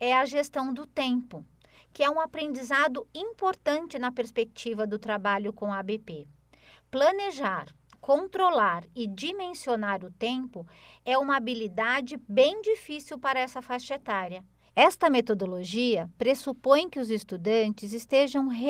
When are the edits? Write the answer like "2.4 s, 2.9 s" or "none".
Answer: 14.7 s